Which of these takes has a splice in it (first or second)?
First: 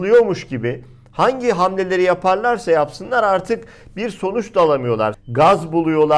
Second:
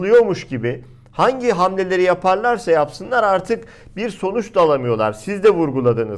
first